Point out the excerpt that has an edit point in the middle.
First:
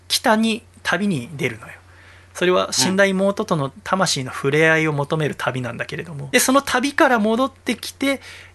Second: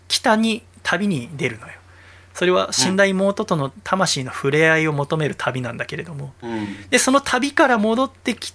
first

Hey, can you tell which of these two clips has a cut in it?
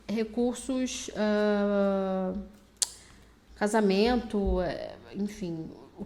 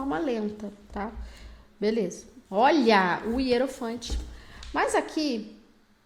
second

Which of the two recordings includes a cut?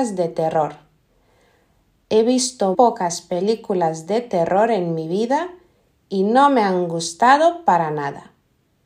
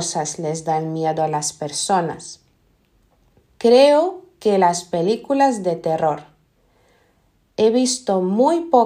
first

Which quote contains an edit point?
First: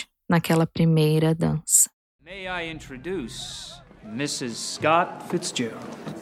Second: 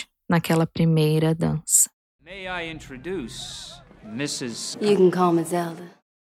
second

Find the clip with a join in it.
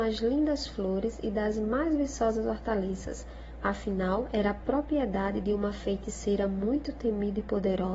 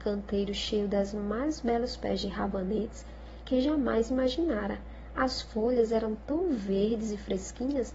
first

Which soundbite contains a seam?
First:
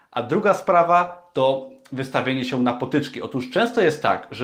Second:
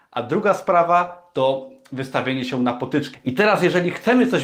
second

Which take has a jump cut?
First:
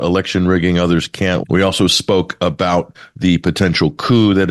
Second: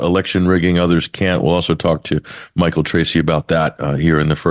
first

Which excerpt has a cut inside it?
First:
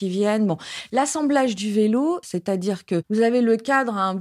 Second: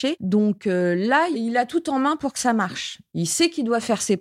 first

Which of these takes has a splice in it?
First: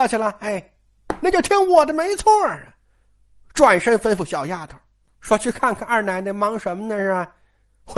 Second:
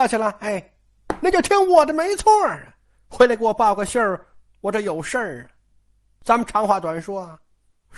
second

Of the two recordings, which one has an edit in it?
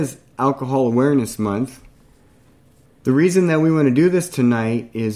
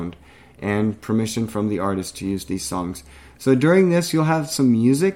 first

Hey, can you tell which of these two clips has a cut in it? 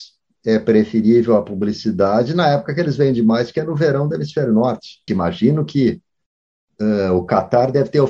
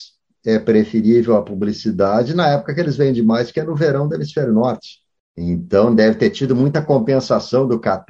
first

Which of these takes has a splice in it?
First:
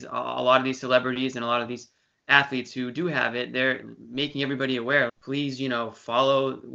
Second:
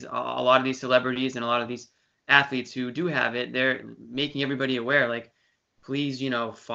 first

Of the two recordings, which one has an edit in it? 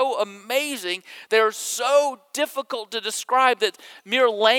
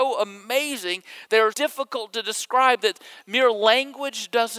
second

